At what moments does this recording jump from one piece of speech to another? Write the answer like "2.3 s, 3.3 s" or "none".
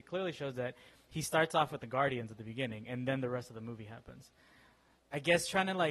5.0 s